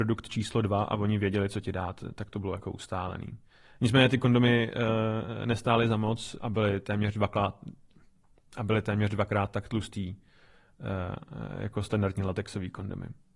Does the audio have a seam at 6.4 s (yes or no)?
yes